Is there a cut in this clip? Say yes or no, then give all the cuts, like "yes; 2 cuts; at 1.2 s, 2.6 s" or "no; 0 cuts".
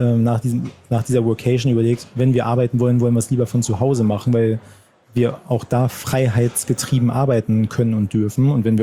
no; 0 cuts